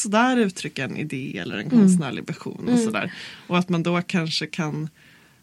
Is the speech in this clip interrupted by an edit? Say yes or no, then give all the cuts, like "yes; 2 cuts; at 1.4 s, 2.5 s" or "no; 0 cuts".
no; 0 cuts